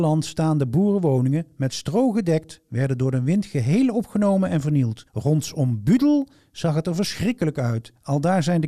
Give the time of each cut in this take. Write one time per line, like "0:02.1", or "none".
none